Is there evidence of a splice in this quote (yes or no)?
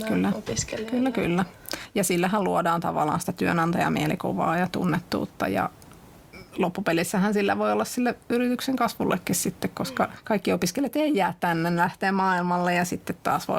no